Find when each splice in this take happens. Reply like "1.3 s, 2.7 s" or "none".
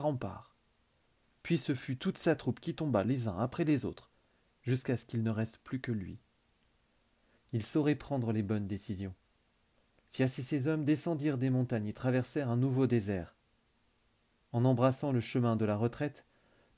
7.4 s